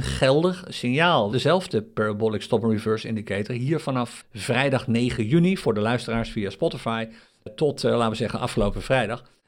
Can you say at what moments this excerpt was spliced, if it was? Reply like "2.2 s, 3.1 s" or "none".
1.3 s, 4.2 s, 7.5 s